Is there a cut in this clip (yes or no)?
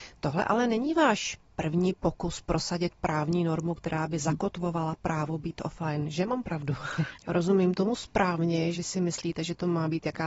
yes